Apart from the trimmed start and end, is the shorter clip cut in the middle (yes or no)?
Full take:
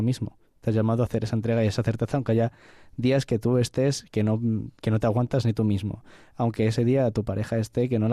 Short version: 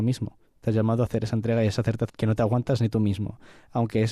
yes